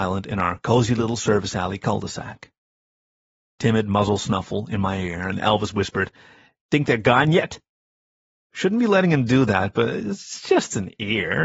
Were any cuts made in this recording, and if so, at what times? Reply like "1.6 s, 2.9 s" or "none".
8.4 s